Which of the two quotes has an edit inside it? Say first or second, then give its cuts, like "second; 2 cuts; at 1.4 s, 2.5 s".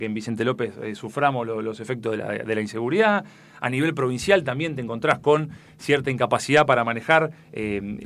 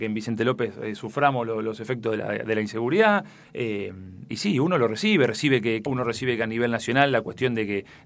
second; 2 cuts; at 3.4 s, 5.9 s